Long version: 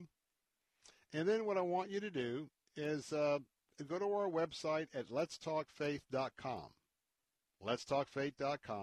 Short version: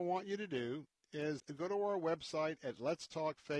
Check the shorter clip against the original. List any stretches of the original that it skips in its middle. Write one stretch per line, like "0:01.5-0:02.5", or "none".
0:03.0-0:03.7